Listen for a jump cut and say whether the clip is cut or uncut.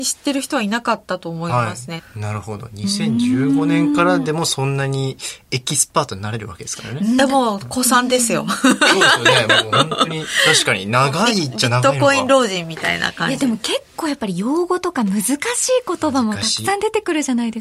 cut